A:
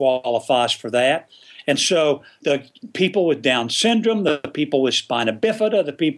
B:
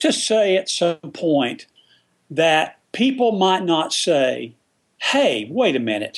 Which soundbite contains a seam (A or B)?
B